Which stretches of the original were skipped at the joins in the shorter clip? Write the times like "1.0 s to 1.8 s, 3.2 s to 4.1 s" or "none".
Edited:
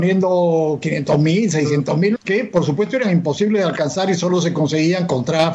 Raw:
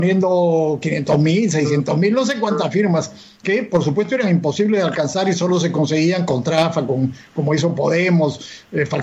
2.2 s to 3.3 s